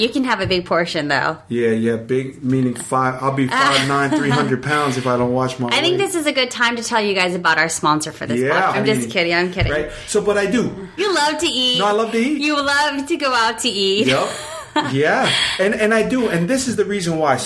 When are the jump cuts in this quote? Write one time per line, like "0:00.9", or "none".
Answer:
0:08.7
0:11.0